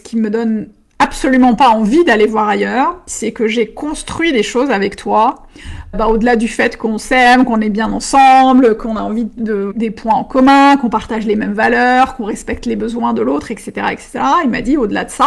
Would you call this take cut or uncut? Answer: cut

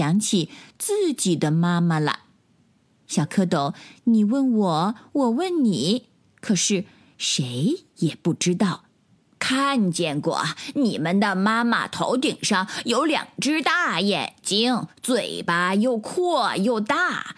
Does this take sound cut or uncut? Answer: cut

